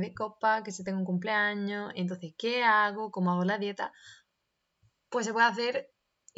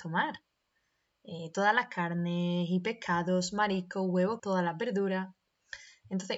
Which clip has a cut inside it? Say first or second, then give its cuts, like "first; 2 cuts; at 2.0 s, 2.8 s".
second; 1 cut; at 4.4 s